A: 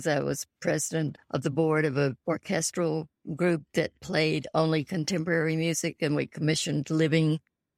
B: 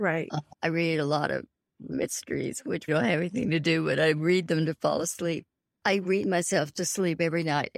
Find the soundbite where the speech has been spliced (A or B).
B